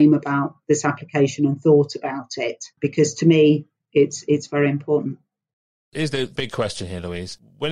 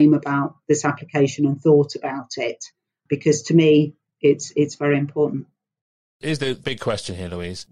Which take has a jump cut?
first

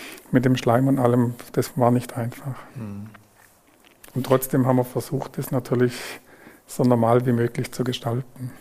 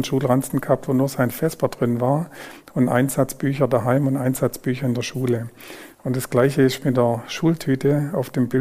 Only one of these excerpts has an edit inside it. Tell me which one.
first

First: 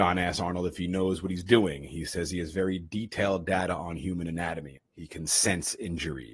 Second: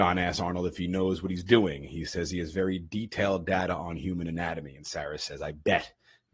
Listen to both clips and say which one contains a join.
first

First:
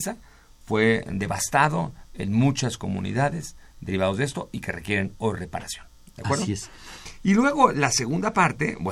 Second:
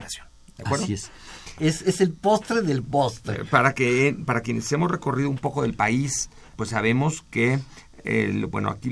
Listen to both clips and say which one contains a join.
second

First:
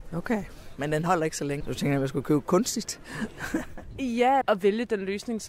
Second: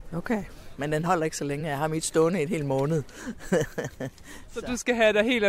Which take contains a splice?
first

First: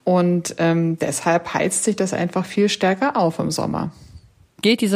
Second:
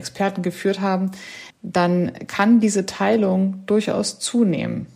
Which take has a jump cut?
second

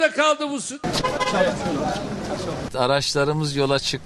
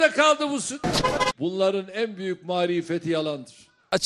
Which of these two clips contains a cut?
second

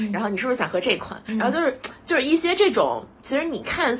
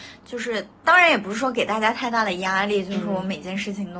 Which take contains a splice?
first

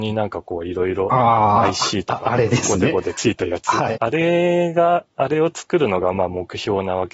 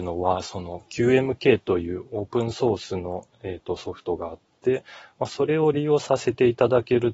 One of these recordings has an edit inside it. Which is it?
first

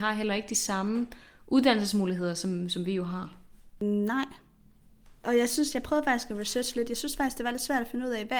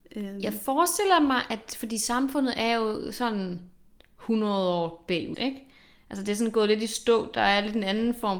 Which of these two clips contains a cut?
second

